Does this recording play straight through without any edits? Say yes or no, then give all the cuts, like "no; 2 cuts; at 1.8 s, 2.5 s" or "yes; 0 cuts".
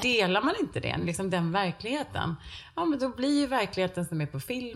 yes; 0 cuts